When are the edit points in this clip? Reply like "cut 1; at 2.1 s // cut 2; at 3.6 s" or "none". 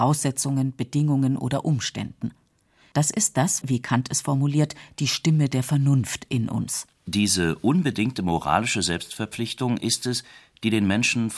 cut 1; at 3.6 s // cut 2; at 7.0 s